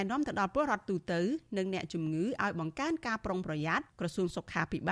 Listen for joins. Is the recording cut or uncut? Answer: cut